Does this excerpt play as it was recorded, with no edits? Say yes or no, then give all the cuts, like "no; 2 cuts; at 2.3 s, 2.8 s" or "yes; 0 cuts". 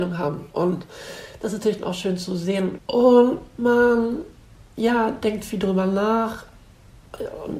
no; 1 cut; at 2.8 s